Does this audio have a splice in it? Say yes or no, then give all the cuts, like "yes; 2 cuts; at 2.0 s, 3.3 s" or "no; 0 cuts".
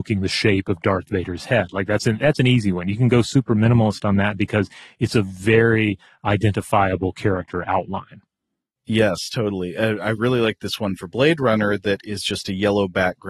no; 0 cuts